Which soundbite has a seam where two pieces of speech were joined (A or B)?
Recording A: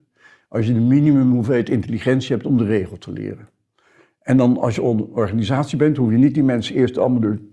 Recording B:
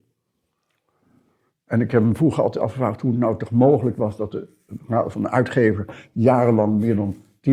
B